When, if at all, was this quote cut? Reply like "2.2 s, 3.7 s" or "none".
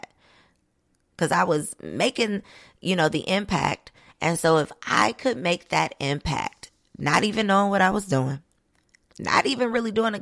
4.1 s, 9.1 s